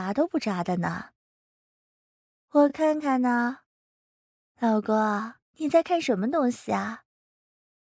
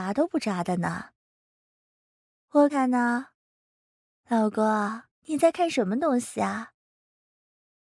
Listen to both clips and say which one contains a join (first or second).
second